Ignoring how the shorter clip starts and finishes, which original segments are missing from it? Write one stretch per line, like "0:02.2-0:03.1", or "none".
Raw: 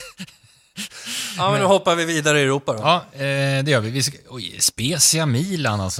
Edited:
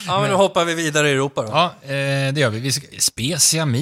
0:04.2-0:04.5